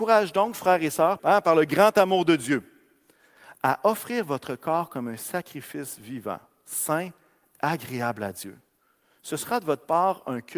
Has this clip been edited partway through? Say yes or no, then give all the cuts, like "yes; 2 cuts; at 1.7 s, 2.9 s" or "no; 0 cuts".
yes; 1 cut; at 1.2 s